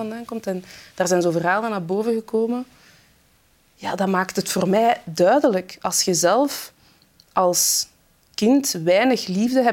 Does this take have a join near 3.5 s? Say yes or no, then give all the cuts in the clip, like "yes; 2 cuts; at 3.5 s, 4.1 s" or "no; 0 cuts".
no; 0 cuts